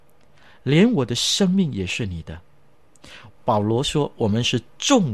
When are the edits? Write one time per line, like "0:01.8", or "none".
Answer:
0:03.3

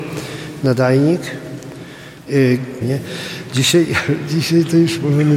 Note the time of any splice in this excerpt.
0:02.8

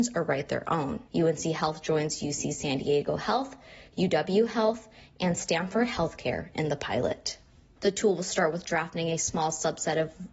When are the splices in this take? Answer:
0:01.1
0:07.8

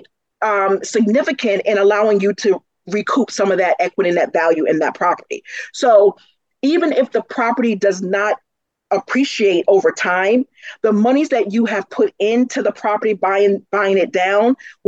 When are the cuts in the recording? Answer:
none

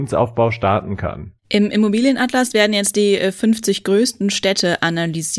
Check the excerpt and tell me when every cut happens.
0:01.4

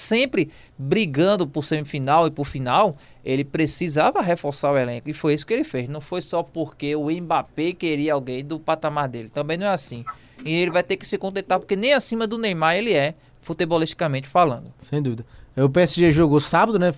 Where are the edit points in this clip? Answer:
none

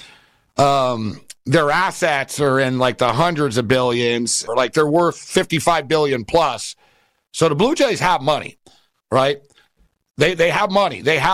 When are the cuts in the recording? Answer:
0:04.5

